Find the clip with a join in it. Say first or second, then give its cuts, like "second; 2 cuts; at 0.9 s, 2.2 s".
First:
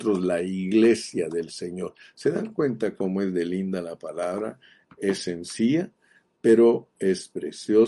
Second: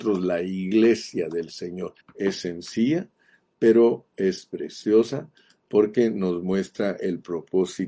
second; 1 cut; at 2.0 s